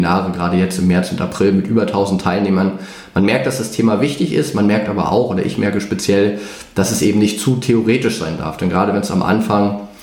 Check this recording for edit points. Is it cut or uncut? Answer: uncut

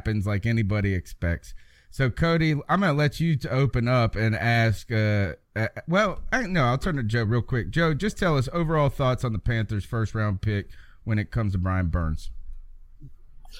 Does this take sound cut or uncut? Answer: uncut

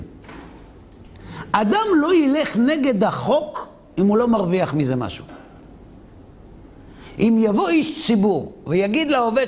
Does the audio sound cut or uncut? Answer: uncut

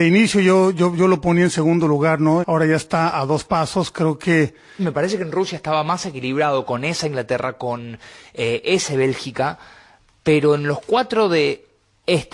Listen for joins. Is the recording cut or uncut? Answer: cut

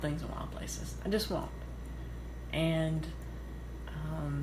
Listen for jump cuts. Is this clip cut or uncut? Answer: uncut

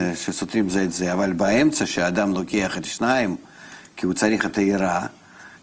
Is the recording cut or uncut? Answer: uncut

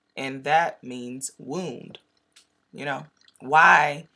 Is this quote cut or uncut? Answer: cut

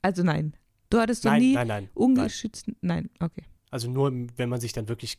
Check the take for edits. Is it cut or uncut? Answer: cut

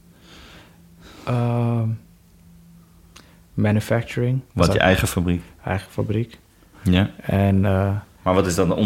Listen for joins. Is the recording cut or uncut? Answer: cut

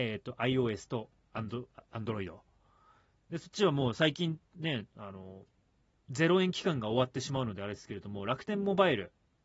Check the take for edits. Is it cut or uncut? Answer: uncut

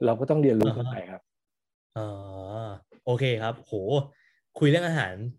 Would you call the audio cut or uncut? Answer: uncut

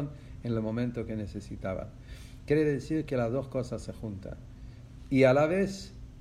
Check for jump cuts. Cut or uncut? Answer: cut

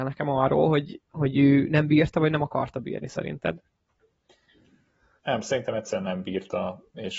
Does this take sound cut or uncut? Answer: cut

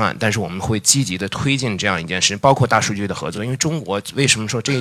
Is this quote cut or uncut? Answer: uncut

